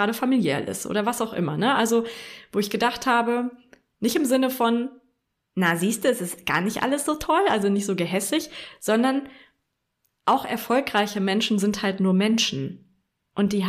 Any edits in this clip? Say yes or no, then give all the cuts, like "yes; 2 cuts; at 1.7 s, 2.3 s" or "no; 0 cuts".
no; 0 cuts